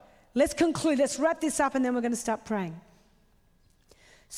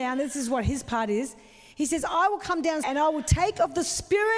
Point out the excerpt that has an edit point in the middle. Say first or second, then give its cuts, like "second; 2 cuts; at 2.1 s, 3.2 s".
second; 1 cut; at 2.8 s